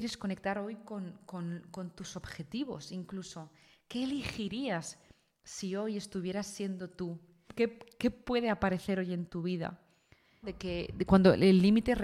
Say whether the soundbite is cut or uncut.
cut